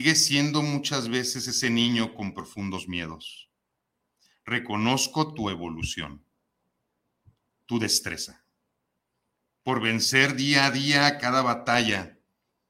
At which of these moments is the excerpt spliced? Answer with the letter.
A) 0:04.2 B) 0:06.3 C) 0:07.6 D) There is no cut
D